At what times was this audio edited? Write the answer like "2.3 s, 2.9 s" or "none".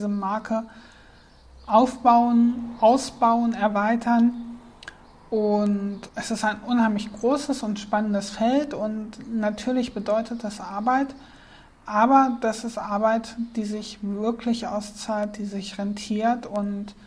6.1 s